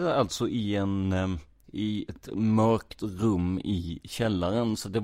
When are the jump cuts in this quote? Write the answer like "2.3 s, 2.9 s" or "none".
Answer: 2.1 s

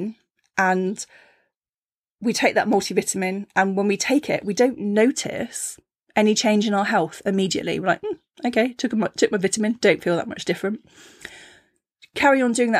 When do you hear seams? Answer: none

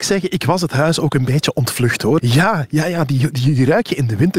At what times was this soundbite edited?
2.2 s

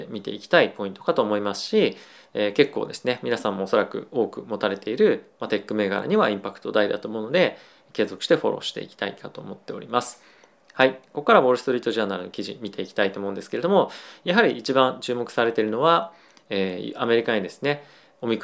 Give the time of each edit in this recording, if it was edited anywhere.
none

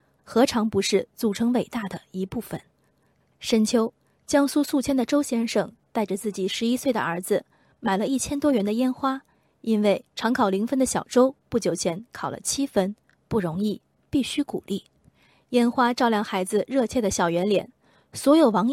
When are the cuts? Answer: none

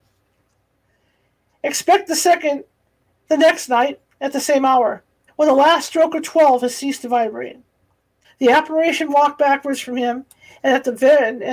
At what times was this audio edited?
5.3 s, 8.2 s

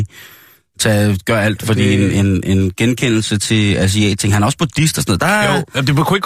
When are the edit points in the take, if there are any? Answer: none

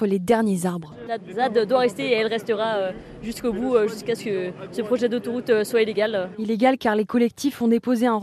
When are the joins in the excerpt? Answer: 1.1 s

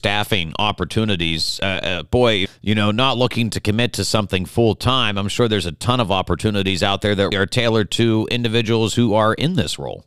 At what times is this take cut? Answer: 2.5 s, 7.3 s

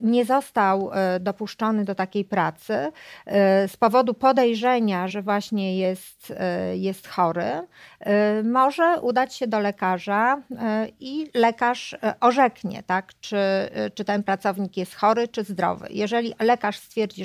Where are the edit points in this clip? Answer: 5.1 s

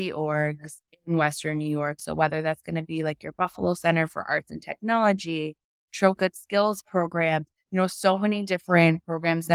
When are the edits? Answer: 2.0 s, 6.2 s

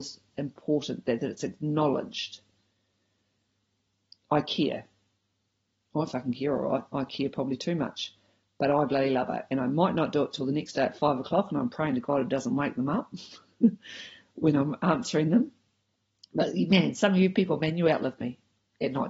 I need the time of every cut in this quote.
none

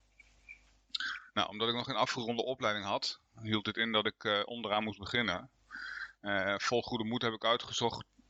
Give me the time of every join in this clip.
none

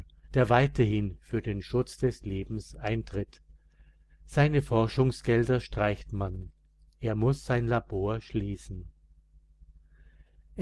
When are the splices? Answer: 4.1 s

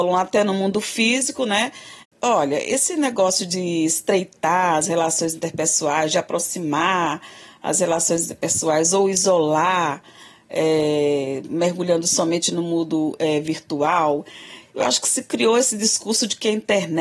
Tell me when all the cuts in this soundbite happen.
2.0 s

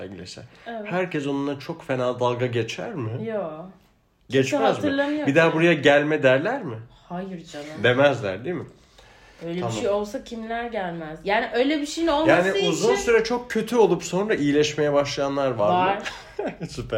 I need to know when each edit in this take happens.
none

